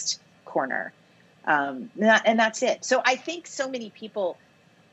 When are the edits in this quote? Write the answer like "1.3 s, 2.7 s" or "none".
none